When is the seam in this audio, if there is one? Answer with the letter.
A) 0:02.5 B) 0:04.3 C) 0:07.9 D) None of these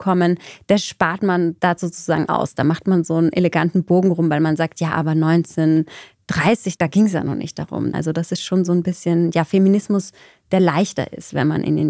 C